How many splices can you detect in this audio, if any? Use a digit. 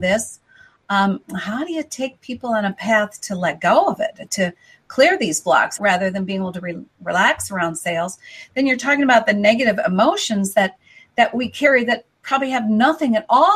1